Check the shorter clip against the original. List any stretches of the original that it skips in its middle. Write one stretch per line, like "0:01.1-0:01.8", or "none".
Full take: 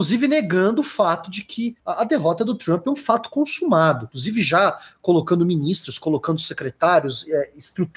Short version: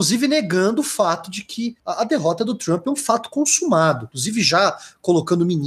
none